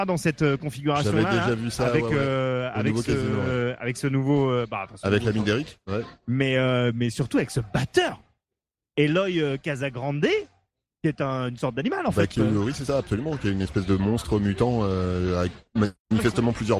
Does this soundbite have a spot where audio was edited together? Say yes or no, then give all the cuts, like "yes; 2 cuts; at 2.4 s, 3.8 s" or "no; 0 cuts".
no; 0 cuts